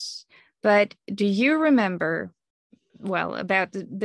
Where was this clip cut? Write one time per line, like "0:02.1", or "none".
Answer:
none